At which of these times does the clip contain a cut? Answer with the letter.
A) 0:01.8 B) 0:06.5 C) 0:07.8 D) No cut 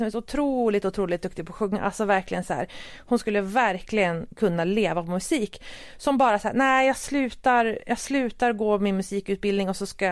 D